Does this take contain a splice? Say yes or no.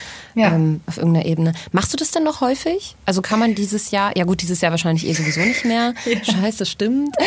no